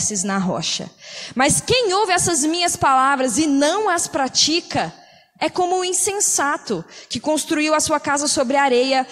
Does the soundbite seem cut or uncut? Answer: uncut